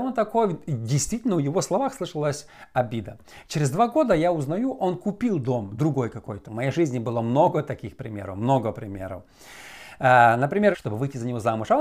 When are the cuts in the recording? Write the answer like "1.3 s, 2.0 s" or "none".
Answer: 6.4 s, 10.7 s

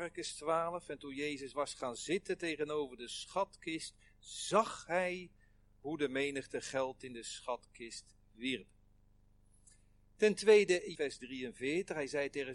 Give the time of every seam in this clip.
10.9 s

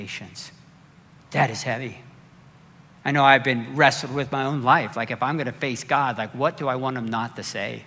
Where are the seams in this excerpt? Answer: 1.2 s

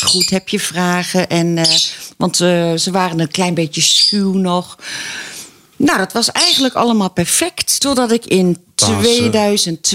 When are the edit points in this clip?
7.8 s

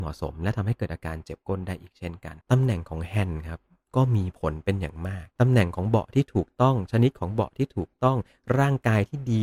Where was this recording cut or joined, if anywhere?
2.4 s, 5.3 s

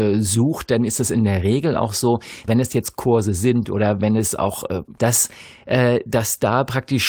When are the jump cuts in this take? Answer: 2.5 s, 5.0 s

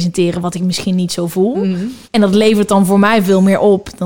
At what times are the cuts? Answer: 2.0 s

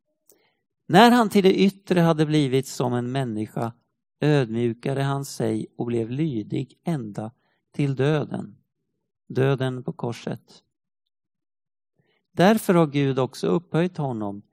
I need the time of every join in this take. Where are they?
none

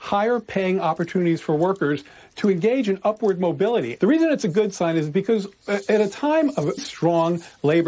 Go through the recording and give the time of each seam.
4.0 s, 6.8 s

